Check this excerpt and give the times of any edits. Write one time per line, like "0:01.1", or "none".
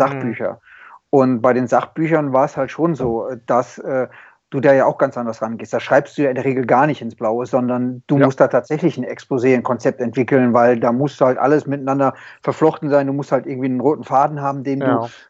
none